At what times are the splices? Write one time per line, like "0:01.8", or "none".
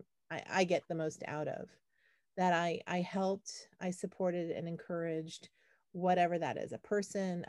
none

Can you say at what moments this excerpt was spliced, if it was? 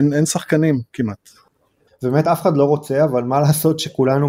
0:01.9

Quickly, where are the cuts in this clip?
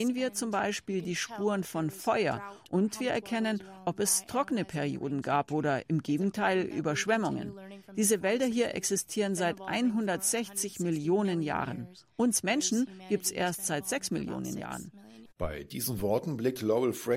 0:15.3

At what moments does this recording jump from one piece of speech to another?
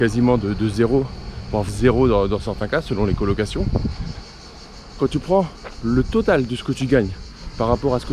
0:01.7

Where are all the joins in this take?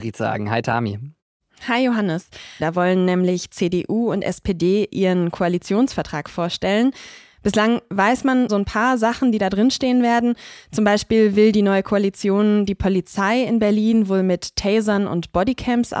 0:02.6
0:08.5

